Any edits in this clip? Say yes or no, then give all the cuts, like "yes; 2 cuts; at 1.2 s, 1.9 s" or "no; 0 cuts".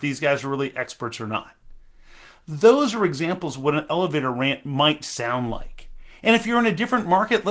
no; 0 cuts